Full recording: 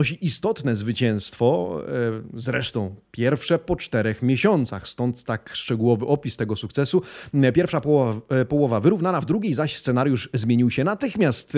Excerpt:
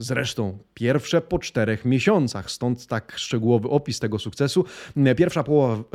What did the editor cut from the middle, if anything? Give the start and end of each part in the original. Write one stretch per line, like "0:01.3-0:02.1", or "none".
none